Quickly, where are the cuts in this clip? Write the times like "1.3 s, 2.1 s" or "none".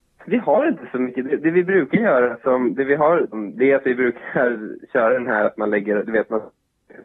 3.3 s